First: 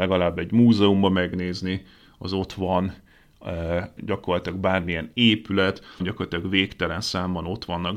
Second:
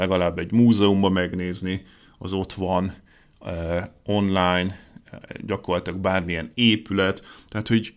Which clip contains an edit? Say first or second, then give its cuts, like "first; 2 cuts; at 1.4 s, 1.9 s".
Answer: first; 2 cuts; at 4.0 s, 6.0 s